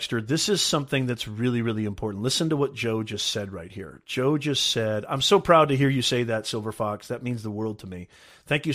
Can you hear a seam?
no; 0 cuts

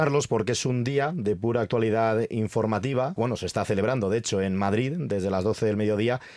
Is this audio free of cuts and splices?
no; 1 cut; at 3.2 s

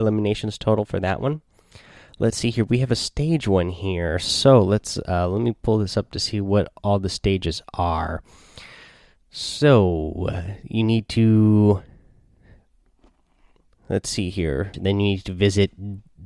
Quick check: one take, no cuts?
no; 1 cut; at 14.7 s

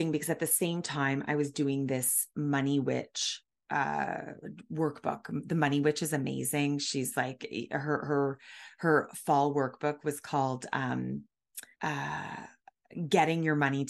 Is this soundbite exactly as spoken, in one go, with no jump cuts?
no; 1 cut; at 11.7 s

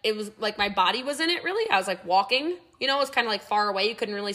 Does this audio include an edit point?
no; 0 cuts

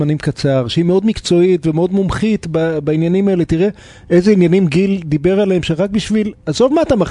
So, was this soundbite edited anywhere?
no; 0 cuts

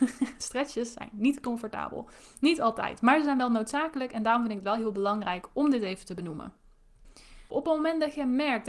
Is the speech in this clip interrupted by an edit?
yes; 1 cut; at 7.5 s

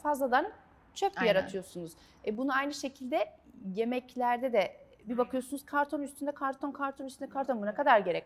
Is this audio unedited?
yes; 0 cuts

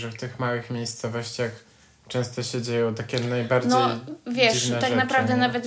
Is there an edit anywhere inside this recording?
no; 0 cuts

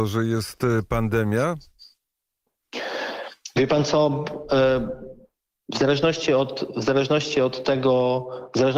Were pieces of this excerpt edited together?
no; 0 cuts

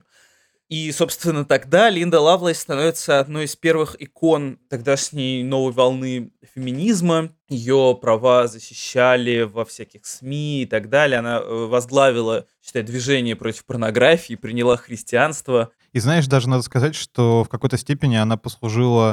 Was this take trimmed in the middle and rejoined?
yes; 1 cut; at 7.4 s

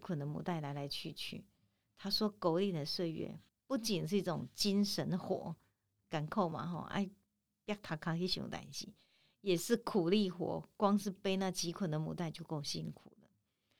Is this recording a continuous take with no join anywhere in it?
no; 1 cut; at 3.5 s

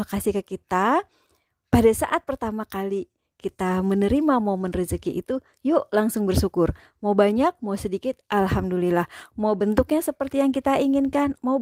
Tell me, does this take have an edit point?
no; 0 cuts

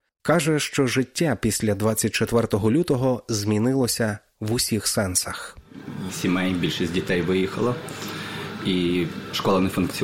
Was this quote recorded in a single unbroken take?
no; 1 cut; at 6.1 s

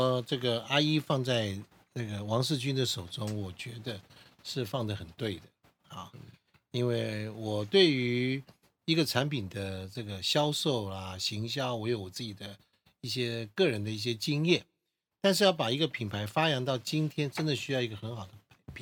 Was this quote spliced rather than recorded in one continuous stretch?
no; 0 cuts

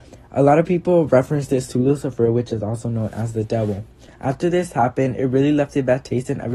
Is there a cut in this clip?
yes; 1 cut; at 4.1 s

